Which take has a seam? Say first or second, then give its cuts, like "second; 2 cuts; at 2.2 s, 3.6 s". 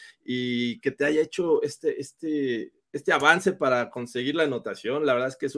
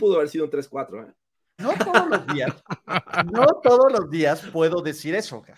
second; 1 cut; at 1.6 s